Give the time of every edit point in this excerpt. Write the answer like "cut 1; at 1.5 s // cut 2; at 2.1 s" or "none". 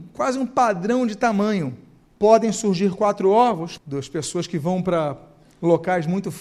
cut 1; at 2.1 s // cut 2; at 3.8 s